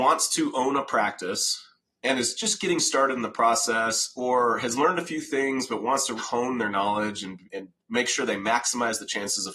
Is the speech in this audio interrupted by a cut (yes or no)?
yes